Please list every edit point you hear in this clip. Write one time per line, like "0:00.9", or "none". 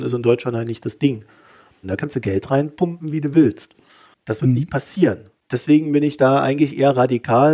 0:01.8